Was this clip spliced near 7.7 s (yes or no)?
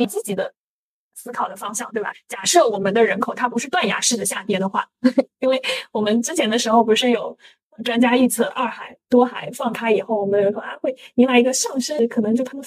no